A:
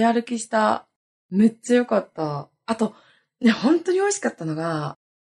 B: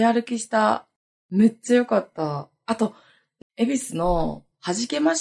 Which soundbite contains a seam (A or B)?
B